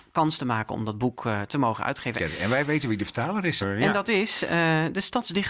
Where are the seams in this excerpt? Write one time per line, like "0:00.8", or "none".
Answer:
0:02.2
0:03.6